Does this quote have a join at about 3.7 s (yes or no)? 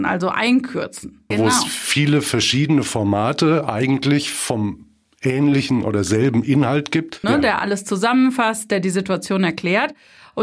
no